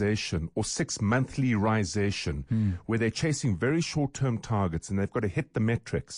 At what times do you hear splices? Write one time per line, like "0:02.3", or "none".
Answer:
none